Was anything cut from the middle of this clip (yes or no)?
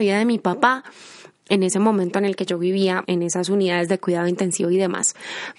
yes